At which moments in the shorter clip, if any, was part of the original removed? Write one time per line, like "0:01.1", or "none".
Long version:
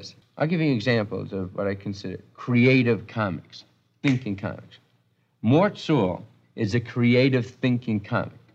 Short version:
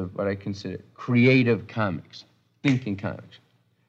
none